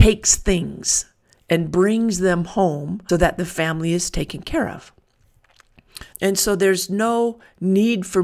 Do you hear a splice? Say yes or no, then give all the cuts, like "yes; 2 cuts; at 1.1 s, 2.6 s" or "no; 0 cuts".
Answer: yes; 2 cuts; at 3.1 s, 6.1 s